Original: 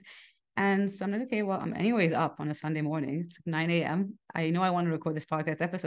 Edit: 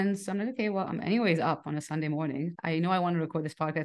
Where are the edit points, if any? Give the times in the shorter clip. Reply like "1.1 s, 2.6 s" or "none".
2.5 s